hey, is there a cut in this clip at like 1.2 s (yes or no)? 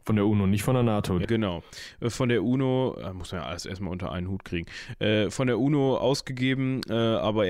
yes